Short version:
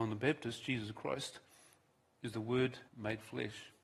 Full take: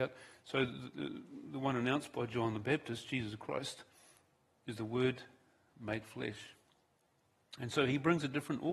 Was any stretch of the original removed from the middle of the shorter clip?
yes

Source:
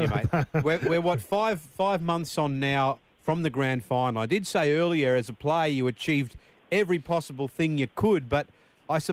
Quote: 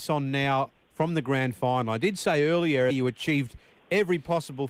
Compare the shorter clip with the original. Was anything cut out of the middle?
yes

